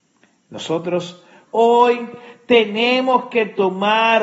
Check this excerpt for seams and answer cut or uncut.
cut